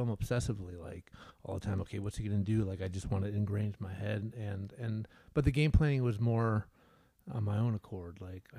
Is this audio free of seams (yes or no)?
yes